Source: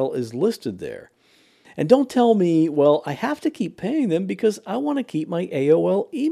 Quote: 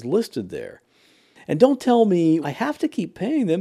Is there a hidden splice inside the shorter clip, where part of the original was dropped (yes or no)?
yes